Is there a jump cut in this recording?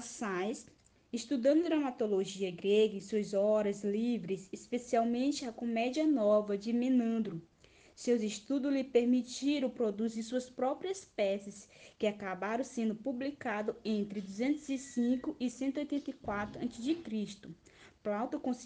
no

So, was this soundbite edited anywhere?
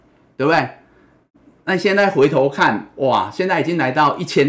no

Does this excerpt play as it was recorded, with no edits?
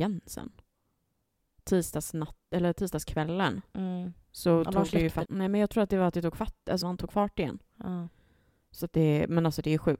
no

